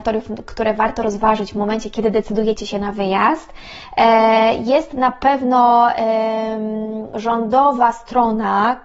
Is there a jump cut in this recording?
no; 0 cuts

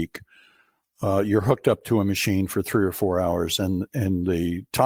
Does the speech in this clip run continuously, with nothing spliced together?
yes; 0 cuts

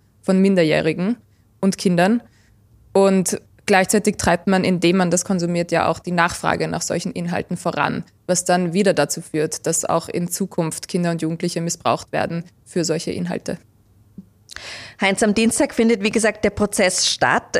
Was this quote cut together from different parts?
no; 0 cuts

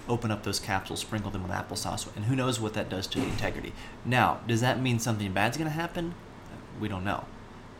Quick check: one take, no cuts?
no; 1 cut; at 4.0 s

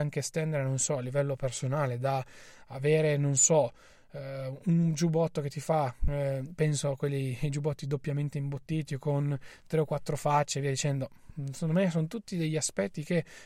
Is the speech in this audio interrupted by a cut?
no; 0 cuts

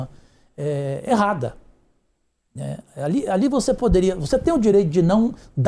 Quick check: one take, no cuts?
yes; 0 cuts

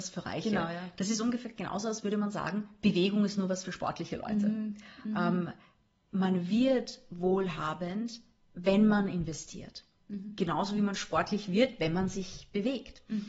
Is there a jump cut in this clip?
no; 0 cuts

